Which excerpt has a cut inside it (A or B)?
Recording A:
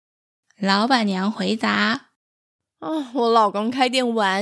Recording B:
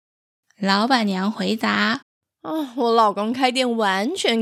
B